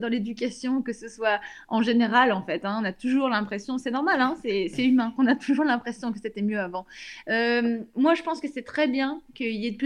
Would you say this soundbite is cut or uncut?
cut